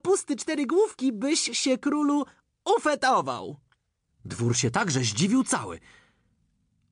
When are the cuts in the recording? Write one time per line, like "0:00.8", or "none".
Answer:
0:04.1